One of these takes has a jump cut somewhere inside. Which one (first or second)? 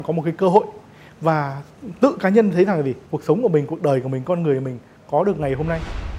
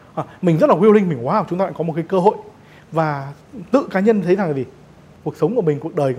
first